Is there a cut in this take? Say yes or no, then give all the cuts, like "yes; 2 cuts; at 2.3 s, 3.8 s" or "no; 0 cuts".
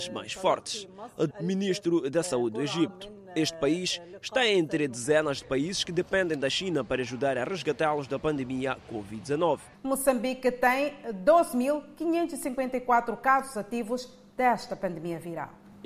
yes; 2 cuts; at 1.3 s, 9.7 s